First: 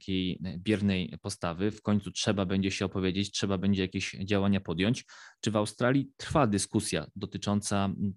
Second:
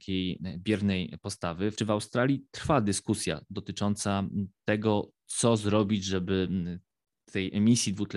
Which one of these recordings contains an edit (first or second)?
second